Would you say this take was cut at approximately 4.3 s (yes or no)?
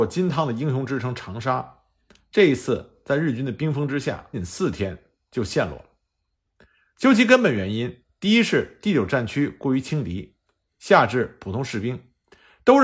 yes